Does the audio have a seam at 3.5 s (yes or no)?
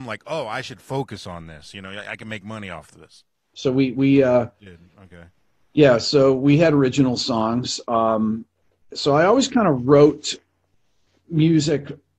yes